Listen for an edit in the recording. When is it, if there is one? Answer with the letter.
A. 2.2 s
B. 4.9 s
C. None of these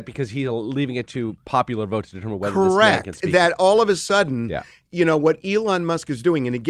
C